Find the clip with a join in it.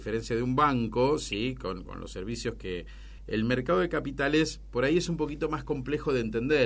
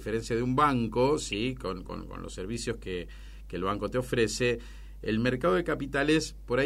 first; 2 cuts; at 1.9 s, 3.2 s

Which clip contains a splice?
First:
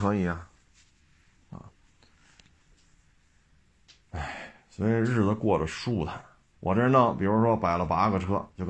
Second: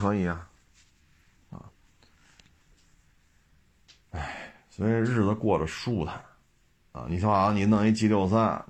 first; 1 cut; at 6.5 s

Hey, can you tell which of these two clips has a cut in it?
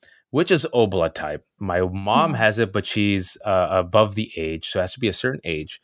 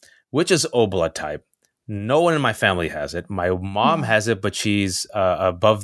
first; 1 cut; at 1.6 s

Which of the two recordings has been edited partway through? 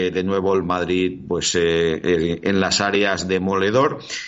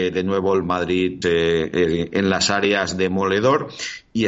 second; 1 cut; at 1.2 s

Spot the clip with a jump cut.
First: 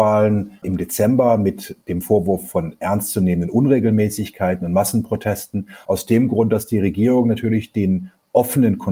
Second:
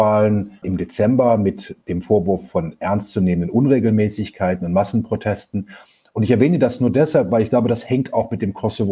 first; 1 cut; at 5.8 s

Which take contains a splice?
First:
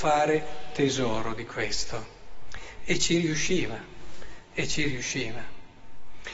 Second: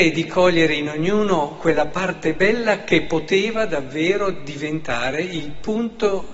first; 1 cut; at 2.8 s

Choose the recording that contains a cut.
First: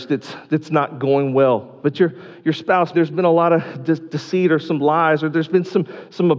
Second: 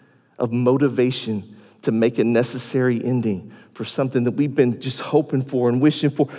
first; 2 cuts; at 1.8 s, 2.9 s

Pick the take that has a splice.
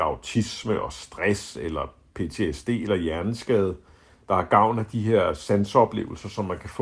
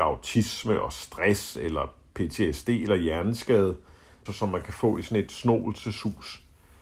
second; 1 cut; at 4.3 s

